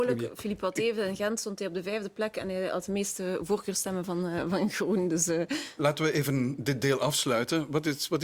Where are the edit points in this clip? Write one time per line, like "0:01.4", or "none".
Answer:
none